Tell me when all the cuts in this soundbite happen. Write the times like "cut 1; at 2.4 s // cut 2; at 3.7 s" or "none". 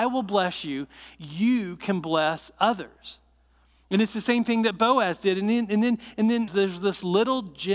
cut 1; at 6.5 s

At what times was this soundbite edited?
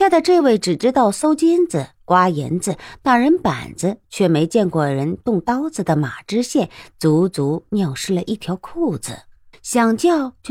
cut 1; at 9.5 s

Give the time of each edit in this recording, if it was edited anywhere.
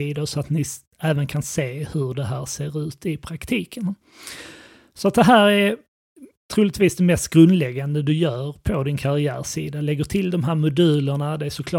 none

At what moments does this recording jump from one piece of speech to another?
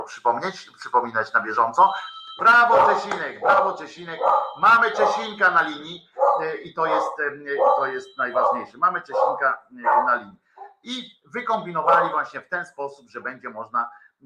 cut 1; at 2.4 s

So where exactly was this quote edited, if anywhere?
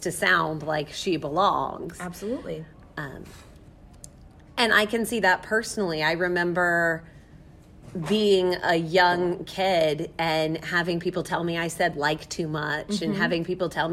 none

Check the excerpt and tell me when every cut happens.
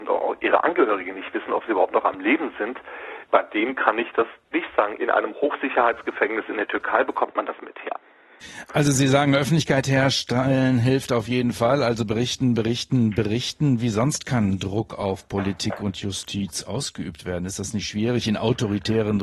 cut 1; at 5.0 s

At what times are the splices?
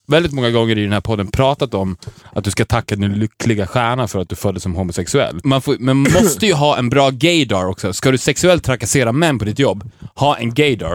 cut 1; at 5.4 s

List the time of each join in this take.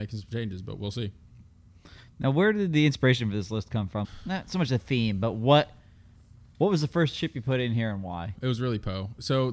cut 1; at 4.0 s // cut 2; at 8.3 s

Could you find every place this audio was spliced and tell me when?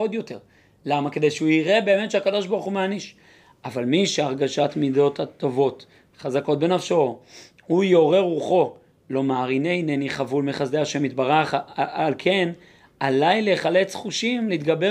none

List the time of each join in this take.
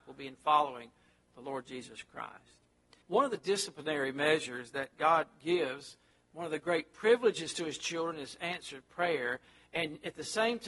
cut 1; at 3.0 s

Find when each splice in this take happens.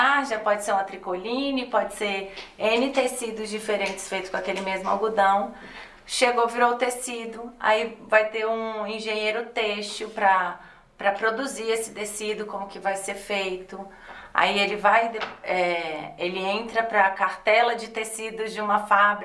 none

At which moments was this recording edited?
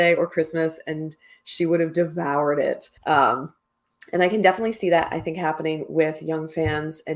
cut 1; at 3.0 s

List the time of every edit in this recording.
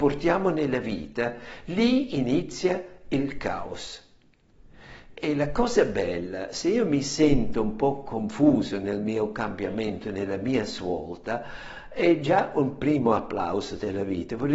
none

